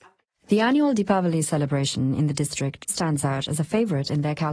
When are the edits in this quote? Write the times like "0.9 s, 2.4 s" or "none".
none